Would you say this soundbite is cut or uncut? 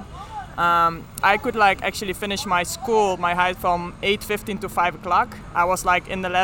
cut